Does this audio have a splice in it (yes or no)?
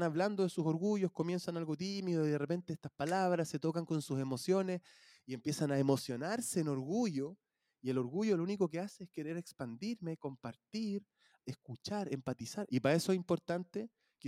yes